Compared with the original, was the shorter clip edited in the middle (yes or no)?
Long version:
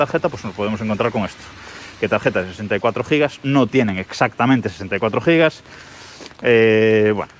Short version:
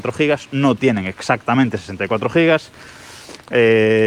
no